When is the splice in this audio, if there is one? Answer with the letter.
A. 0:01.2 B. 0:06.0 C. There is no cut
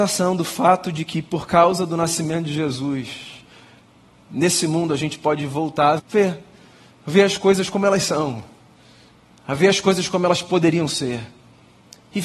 B